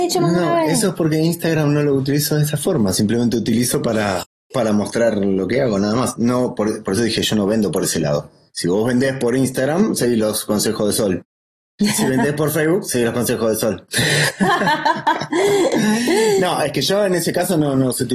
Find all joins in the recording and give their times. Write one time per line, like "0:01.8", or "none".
none